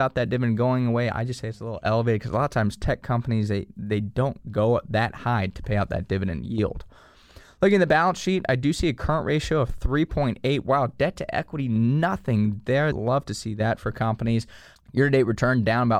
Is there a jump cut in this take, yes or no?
yes